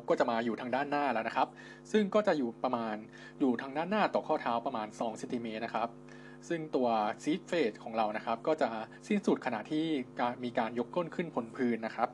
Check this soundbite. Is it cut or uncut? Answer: cut